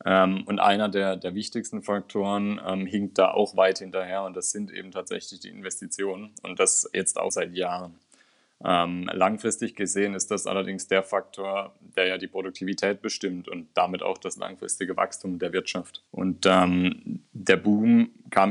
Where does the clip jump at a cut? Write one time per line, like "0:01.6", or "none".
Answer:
0:07.3
0:16.1